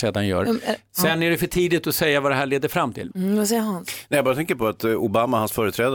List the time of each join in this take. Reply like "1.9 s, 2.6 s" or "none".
3.1 s